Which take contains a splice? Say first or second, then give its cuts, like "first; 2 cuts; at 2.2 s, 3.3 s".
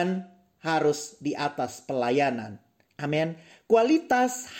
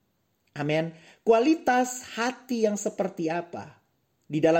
first; 1 cut; at 2.9 s